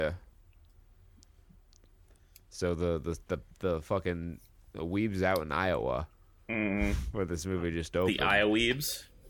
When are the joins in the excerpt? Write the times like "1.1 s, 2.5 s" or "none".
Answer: none